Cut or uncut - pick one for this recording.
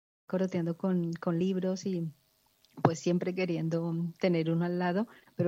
uncut